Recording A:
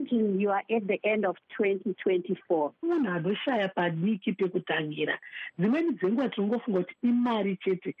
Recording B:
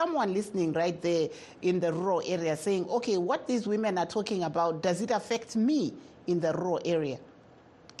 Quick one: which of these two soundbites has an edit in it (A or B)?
A